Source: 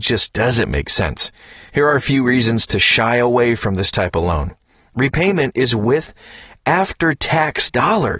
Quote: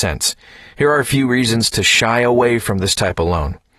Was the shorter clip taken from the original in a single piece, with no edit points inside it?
yes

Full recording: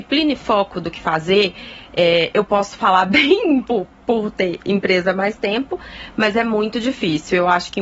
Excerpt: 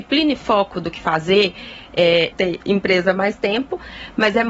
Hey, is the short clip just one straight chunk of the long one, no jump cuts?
no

